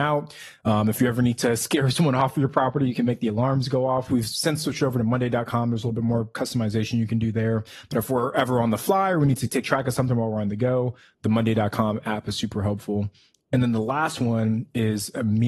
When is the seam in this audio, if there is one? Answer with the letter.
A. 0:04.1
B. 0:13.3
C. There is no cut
A